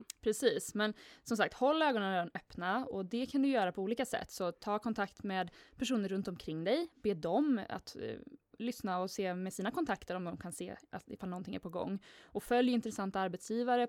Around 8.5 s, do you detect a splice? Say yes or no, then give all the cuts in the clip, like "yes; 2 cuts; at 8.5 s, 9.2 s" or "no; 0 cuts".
yes; 1 cut; at 8.5 s